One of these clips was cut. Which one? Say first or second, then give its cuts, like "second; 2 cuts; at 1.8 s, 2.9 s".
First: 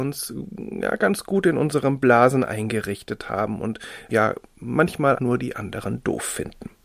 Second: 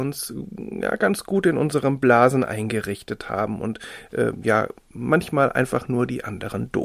first; 2 cuts; at 4.1 s, 5.2 s